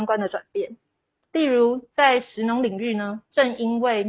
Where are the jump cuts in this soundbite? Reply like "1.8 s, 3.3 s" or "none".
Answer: 1.2 s